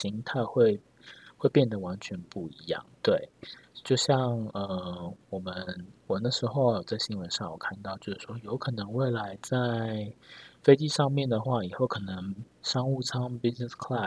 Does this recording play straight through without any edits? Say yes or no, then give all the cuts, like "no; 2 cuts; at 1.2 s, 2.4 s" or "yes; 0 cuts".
no; 1 cut; at 2.9 s